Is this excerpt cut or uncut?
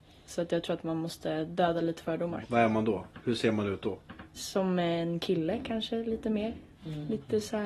cut